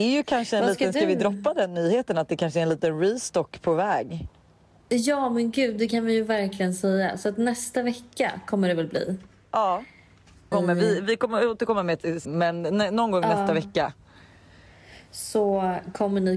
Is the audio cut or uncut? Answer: cut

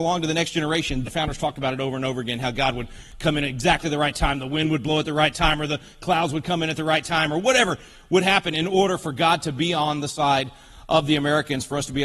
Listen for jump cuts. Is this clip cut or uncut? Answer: cut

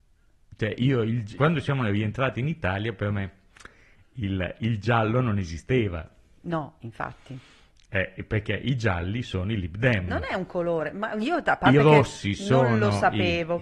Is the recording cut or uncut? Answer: cut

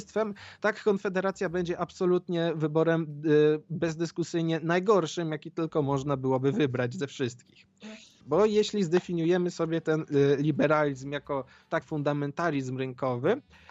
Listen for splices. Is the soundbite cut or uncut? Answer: cut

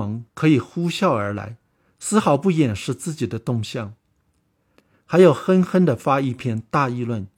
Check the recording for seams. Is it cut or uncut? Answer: cut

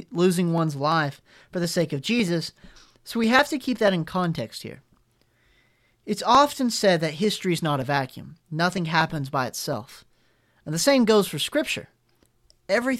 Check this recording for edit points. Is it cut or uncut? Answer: uncut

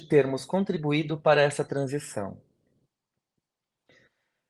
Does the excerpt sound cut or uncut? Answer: uncut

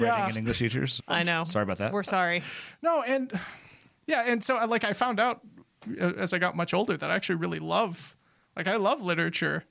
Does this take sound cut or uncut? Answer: cut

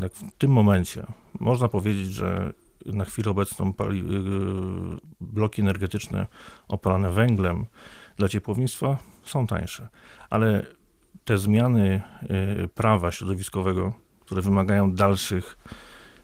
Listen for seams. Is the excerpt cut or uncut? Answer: uncut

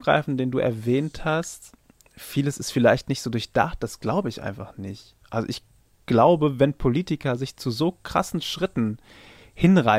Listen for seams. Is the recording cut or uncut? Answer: uncut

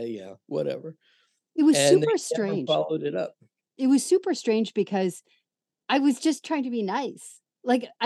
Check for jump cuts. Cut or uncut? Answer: uncut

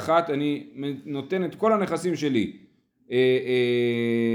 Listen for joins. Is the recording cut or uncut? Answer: uncut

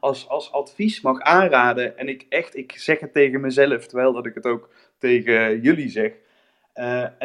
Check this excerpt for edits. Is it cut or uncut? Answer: uncut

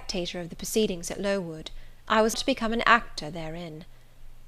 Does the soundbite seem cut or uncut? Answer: cut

